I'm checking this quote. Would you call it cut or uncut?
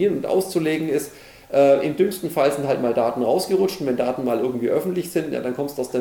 uncut